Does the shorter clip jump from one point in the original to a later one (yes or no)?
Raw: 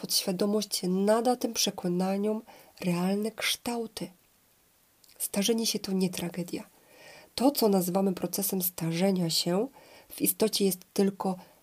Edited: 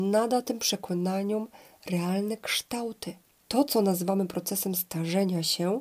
yes